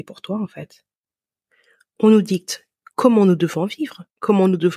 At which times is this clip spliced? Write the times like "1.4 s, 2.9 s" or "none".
none